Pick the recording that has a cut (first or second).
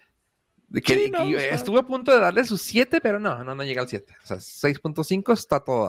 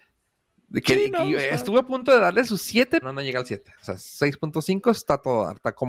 second